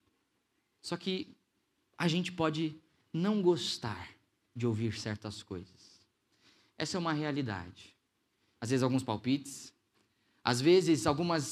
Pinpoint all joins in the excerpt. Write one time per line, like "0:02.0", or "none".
0:08.5